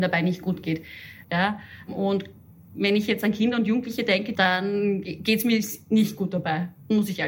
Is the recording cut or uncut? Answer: cut